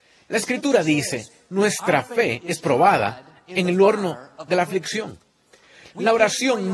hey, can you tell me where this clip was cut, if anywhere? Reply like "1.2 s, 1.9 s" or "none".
none